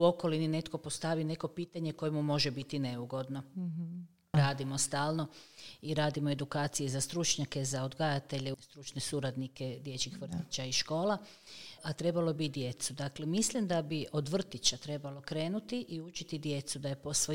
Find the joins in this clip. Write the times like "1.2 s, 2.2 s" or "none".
4.3 s, 8.5 s, 11.8 s

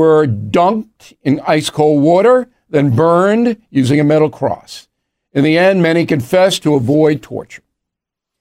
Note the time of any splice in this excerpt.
none

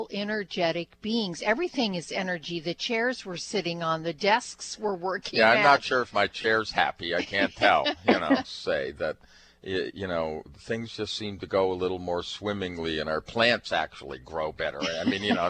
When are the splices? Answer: 8.4 s

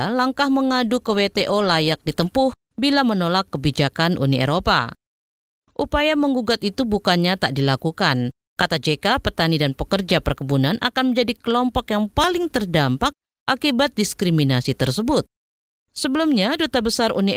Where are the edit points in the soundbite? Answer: 8.5 s

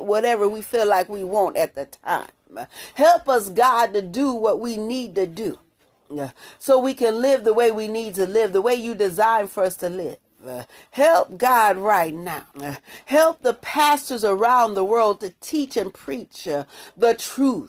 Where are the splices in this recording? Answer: 12.5 s

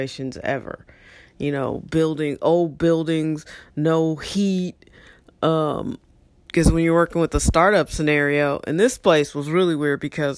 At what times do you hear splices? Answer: none

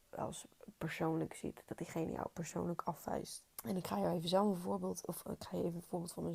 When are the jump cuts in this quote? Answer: 3.5 s

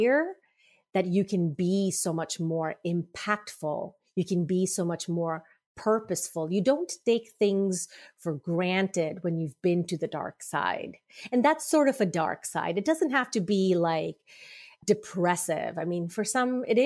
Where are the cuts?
none

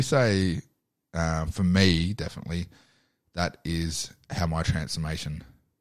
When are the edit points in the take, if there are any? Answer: none

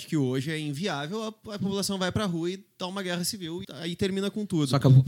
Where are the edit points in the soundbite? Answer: 3.6 s

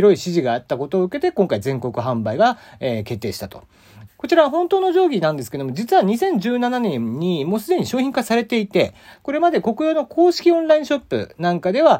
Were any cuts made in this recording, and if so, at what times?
4.1 s

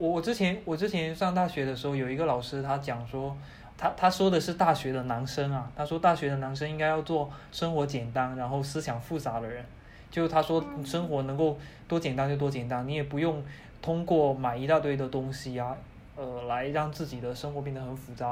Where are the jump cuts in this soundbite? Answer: 3.7 s

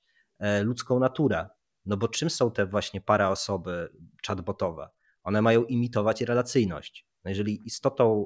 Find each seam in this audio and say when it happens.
none

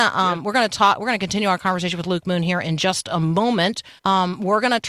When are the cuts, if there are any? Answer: 4.0 s

